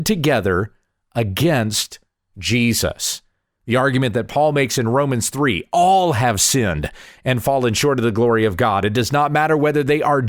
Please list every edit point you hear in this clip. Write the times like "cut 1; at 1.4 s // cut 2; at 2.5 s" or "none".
none